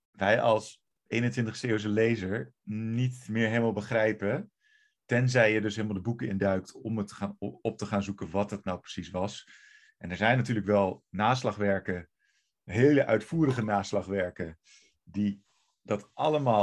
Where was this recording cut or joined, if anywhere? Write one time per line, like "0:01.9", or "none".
none